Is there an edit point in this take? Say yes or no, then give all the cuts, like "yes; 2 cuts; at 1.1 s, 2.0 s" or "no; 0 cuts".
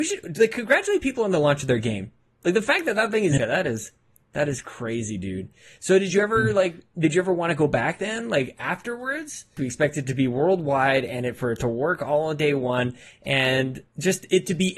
yes; 2 cuts; at 3.4 s, 9.6 s